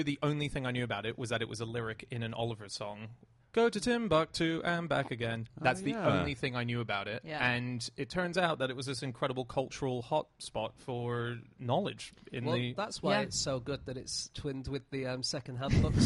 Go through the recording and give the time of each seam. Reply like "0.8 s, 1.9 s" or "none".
none